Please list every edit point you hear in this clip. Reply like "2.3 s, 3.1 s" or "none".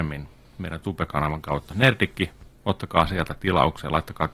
none